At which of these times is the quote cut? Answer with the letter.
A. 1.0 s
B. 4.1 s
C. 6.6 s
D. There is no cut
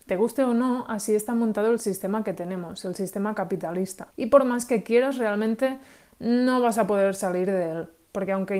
B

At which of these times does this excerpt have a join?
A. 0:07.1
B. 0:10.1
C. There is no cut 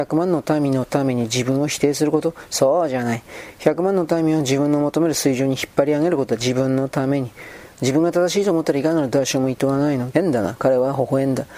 B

